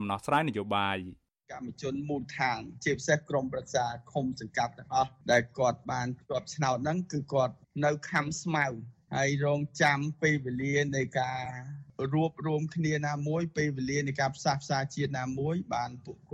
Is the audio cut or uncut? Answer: uncut